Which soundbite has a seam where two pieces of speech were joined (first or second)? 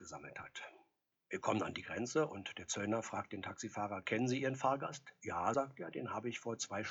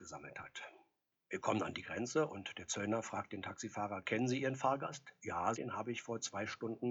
second